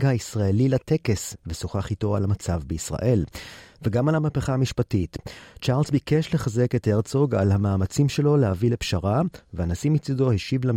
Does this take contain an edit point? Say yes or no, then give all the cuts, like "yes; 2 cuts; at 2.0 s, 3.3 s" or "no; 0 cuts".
yes; 1 cut; at 1.3 s